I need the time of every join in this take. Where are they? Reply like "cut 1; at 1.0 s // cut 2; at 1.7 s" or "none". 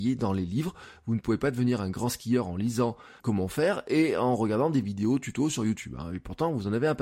cut 1; at 3.2 s